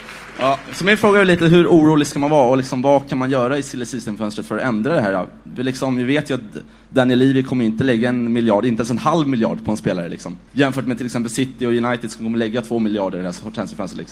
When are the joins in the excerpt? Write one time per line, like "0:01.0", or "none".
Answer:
0:10.5